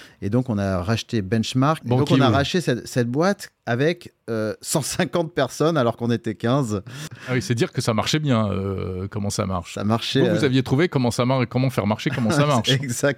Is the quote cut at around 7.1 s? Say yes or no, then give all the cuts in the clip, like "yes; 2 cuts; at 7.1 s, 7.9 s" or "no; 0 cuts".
yes; 2 cuts; at 1.8 s, 7.1 s